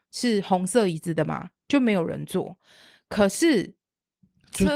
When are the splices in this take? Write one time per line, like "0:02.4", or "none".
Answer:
none